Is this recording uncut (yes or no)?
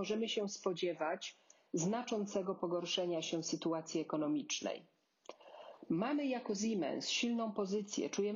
yes